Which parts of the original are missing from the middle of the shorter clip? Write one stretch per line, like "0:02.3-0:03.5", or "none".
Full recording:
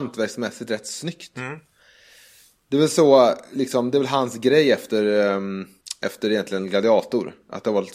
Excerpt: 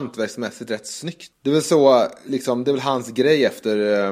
0:01.3-0:02.6